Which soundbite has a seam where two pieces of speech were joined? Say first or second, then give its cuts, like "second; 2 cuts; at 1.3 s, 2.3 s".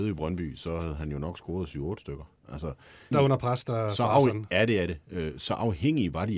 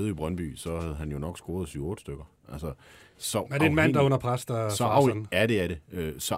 first; 1 cut; at 3.1 s